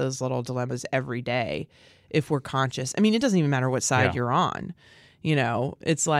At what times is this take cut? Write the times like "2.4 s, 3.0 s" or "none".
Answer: none